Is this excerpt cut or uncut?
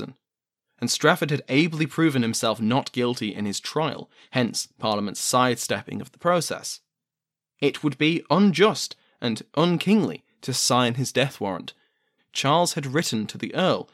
cut